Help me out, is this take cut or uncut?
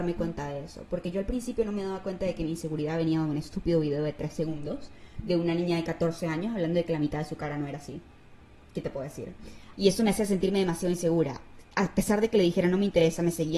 cut